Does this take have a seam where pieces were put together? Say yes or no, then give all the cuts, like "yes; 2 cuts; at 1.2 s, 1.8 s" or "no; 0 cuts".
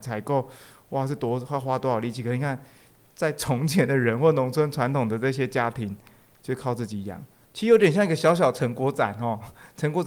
yes; 1 cut; at 7.5 s